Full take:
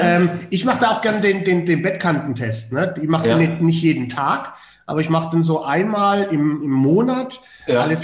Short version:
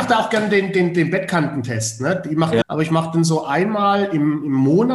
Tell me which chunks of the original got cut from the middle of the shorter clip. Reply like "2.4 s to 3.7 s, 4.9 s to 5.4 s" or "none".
3.3 s to 4.8 s